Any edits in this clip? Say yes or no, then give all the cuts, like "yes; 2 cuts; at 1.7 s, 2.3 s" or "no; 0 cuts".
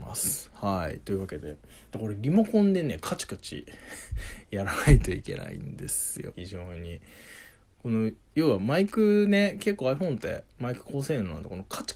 yes; 1 cut; at 6.3 s